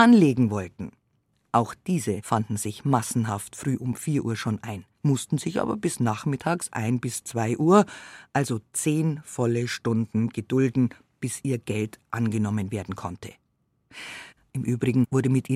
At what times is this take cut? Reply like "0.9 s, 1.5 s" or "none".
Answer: 4.9 s, 14.5 s